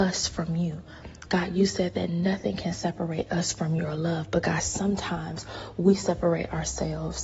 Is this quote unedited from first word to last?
yes; 0 cuts

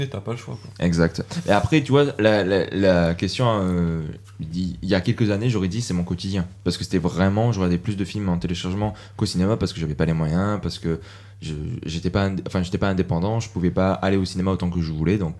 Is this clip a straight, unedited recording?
yes; 0 cuts

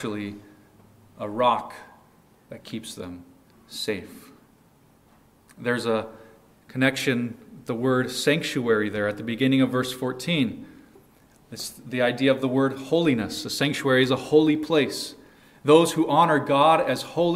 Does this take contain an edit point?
no; 0 cuts

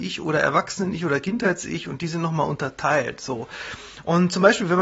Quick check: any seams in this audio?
no; 0 cuts

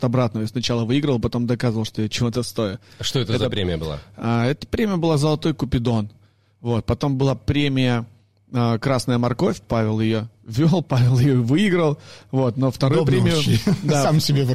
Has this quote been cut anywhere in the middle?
no; 0 cuts

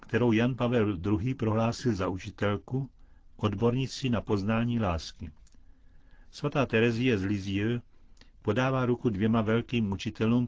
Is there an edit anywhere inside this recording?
no; 0 cuts

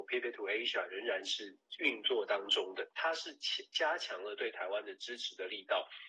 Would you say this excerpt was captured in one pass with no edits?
yes; 0 cuts

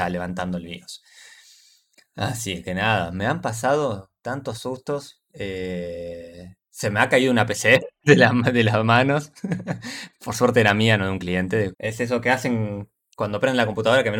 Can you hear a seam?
yes; 1 cut; at 11.7 s

